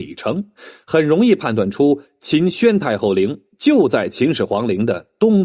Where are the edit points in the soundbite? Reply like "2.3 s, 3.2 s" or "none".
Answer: none